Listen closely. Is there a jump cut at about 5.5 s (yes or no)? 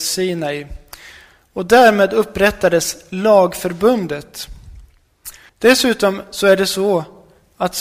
yes